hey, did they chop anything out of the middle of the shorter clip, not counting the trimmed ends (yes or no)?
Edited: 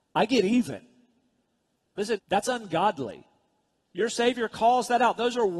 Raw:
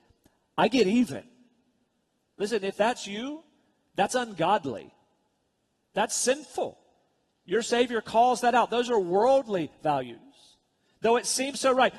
yes